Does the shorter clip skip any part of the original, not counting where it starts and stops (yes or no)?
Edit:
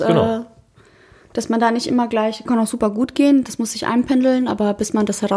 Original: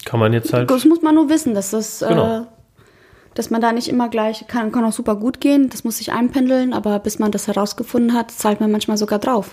yes